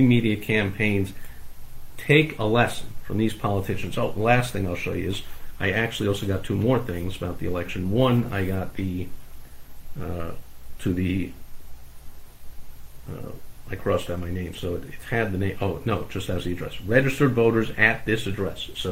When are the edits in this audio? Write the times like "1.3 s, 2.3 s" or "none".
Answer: none